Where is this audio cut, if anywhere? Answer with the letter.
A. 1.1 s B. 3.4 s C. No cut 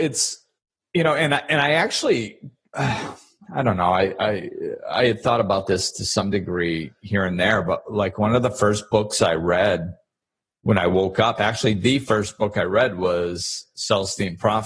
B